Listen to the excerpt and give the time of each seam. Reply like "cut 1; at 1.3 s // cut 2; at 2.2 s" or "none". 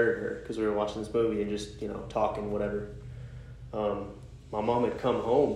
none